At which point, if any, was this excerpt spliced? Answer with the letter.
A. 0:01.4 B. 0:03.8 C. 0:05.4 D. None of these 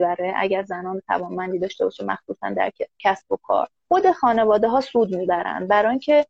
B